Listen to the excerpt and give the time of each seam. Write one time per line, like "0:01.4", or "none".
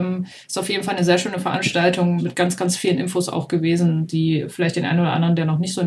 0:02.2